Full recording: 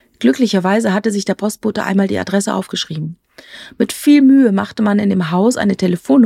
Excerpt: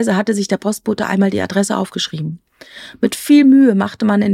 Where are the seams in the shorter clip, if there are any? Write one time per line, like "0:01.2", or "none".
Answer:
none

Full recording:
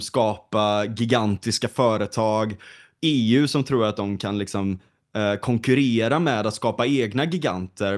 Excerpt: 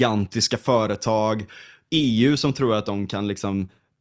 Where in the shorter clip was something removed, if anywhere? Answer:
none

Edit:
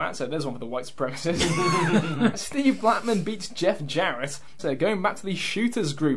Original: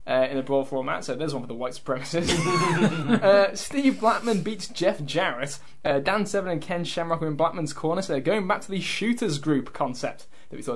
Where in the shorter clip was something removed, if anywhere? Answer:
0:02.3
0:04.6

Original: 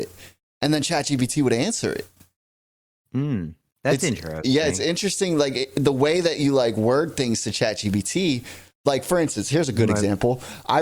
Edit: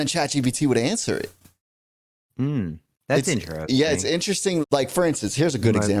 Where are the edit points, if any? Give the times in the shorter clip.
0:04.6

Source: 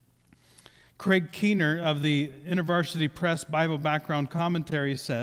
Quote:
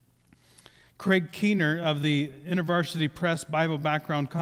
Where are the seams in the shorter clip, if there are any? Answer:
none

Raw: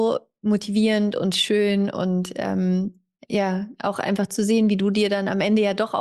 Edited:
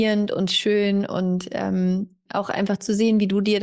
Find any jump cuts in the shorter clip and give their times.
0:02.3

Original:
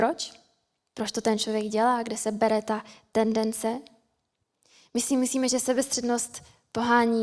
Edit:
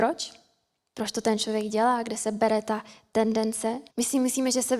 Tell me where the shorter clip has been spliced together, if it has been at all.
0:03.9

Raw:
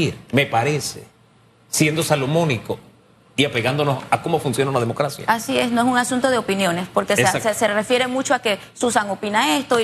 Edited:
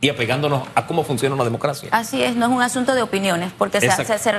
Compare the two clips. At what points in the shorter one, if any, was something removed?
none

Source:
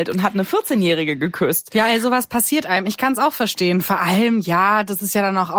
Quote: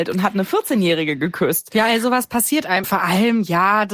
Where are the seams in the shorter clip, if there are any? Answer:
0:02.8

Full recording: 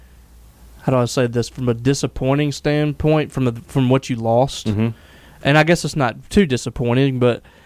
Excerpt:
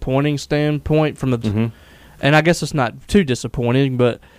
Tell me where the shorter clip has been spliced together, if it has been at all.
0:01.4

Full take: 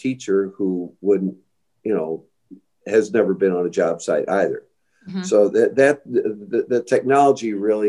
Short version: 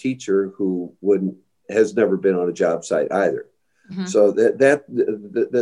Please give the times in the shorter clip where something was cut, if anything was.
0:01.6

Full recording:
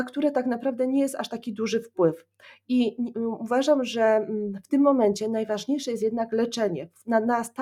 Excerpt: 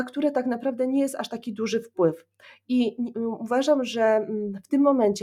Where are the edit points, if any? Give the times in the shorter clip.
none

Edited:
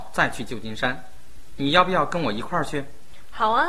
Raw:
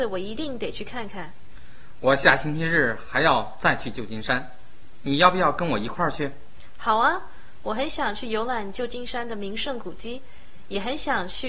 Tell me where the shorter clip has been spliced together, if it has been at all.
none

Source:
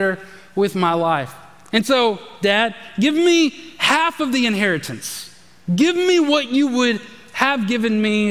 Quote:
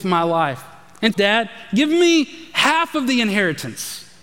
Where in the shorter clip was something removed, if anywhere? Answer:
0:01.1

